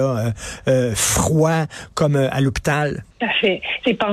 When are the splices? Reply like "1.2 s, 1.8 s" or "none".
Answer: 3.1 s